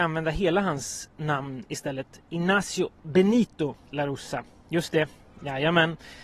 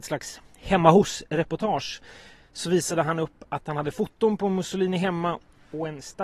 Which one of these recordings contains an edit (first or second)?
first